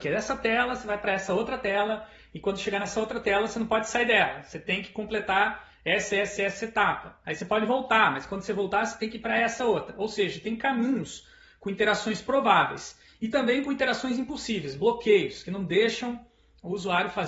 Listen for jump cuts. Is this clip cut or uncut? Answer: uncut